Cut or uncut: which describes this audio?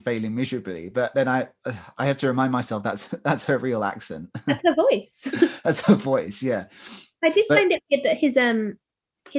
uncut